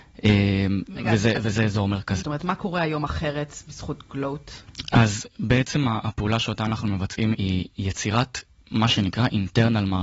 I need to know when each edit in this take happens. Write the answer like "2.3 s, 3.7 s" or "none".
2.2 s, 7.3 s